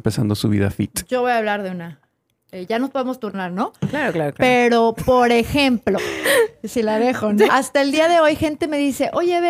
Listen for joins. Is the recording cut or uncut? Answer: cut